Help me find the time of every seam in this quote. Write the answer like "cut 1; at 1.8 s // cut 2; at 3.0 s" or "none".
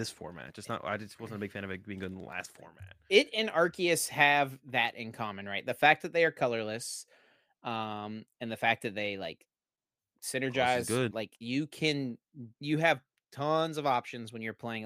cut 1; at 11.1 s // cut 2; at 12.5 s